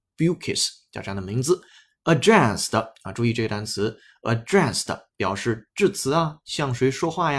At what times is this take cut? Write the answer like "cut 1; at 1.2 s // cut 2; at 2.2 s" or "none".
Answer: none